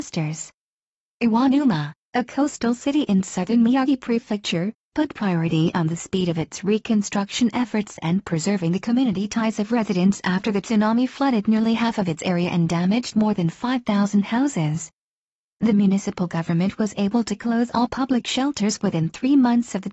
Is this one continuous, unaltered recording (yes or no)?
yes